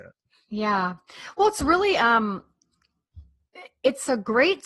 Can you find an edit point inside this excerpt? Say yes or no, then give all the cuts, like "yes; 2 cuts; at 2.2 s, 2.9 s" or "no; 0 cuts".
no; 0 cuts